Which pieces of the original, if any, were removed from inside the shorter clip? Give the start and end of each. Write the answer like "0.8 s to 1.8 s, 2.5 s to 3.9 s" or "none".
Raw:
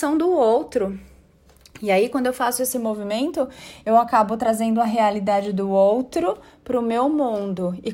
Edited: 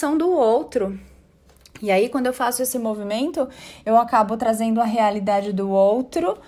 none